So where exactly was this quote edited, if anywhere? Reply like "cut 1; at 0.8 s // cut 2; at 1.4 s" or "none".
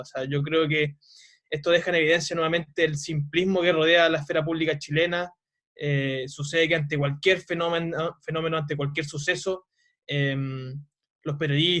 none